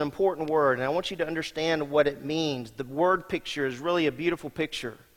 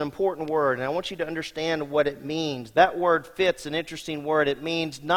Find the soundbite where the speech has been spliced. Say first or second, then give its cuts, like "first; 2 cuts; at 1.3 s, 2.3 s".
second; 1 cut; at 2.7 s